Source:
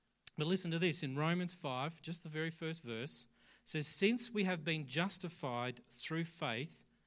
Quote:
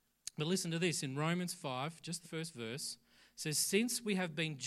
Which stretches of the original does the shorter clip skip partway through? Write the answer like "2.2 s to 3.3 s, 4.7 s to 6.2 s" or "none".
2.2 s to 2.5 s